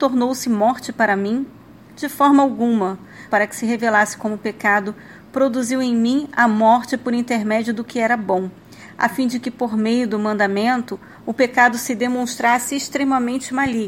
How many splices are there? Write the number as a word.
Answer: one